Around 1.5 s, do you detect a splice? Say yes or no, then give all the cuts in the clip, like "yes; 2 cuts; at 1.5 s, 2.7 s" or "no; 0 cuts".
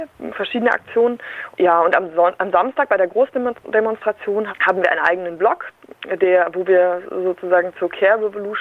yes; 1 cut; at 1.5 s